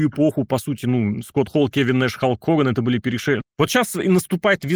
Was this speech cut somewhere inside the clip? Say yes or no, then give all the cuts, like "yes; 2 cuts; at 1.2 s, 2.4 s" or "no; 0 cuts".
yes; 1 cut; at 3.4 s